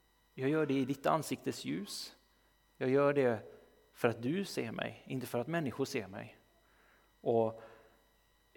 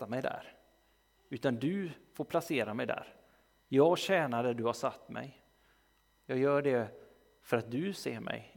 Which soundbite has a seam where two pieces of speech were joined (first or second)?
second